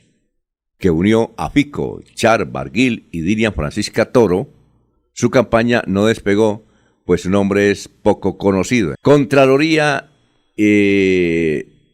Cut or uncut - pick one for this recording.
cut